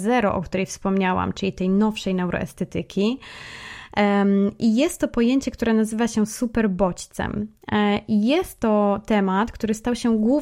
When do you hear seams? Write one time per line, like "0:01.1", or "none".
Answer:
none